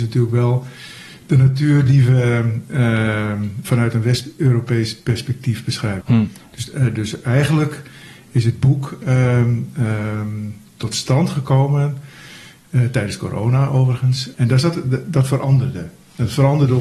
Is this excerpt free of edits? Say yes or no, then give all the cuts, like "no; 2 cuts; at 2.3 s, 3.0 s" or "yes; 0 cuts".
no; 2 cuts; at 6.0 s, 14.3 s